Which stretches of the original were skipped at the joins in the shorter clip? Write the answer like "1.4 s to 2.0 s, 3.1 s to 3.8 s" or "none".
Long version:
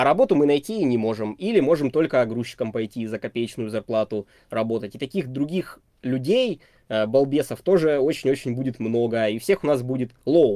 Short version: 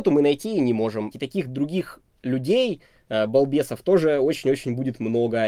1.4 s to 4.9 s

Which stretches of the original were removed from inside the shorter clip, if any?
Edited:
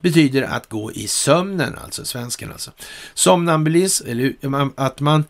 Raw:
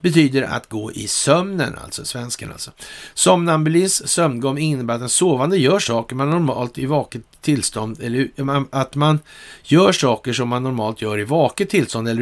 4.0 s to 8.0 s

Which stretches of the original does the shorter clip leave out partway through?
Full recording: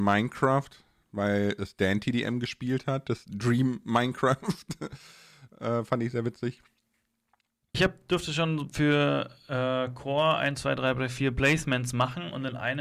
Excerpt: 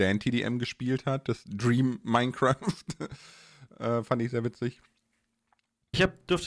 none

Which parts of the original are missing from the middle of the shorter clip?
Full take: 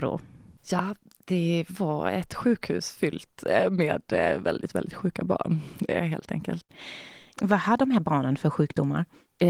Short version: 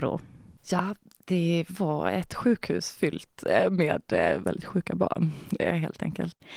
4.4 s to 4.7 s

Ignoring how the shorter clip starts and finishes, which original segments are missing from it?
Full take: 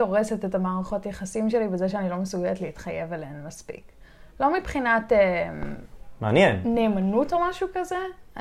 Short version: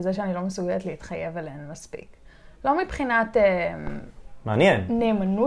none

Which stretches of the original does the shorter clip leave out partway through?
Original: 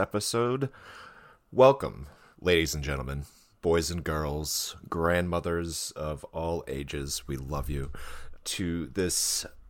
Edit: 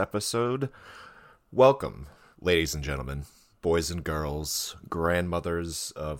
none

